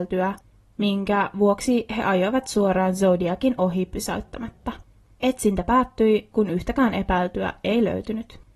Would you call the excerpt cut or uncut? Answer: cut